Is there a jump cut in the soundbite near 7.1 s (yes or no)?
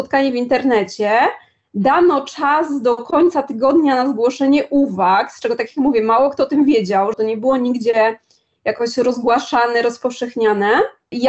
yes